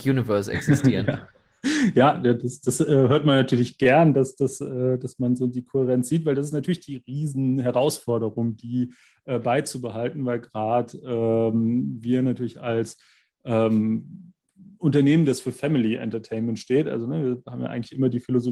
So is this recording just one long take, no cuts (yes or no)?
yes